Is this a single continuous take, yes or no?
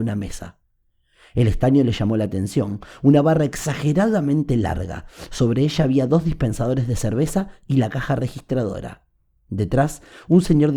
yes